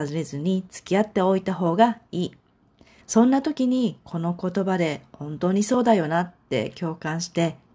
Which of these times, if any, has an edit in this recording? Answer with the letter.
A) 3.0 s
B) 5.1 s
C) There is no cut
A